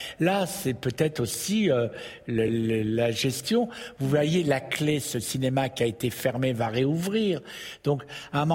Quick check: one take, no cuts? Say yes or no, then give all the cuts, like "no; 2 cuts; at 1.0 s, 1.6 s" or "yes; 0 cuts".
yes; 0 cuts